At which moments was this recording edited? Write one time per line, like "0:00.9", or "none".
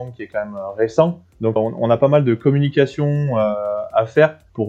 0:01.6

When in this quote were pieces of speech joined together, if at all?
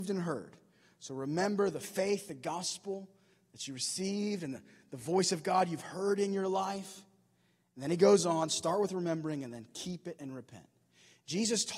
none

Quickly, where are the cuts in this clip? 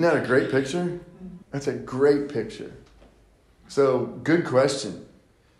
0:01.4

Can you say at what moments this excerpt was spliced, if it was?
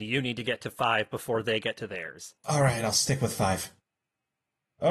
0:02.4
0:03.8

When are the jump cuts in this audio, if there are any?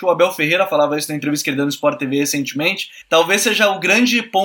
0:03.0

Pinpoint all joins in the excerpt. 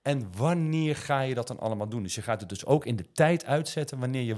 none

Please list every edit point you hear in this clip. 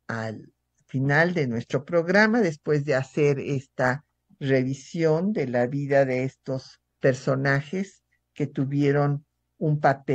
0:06.9

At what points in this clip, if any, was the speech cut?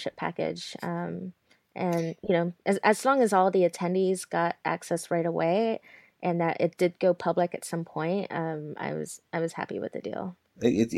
none

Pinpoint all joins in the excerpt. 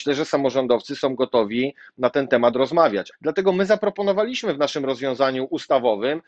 0:03.1

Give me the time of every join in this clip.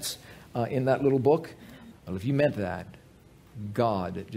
0:01.9

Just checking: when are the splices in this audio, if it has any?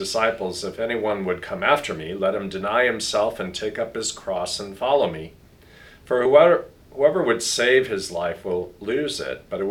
none

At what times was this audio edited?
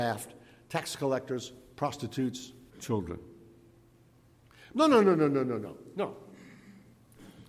0:02.7
0:04.7

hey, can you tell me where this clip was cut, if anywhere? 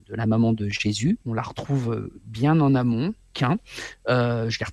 0:01.2
0:03.3

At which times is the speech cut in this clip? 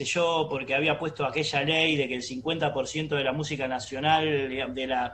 none

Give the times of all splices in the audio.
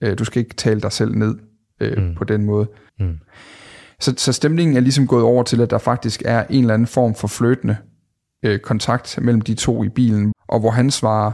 0:02.9
0:10.3

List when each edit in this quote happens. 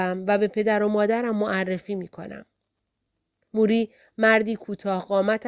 none

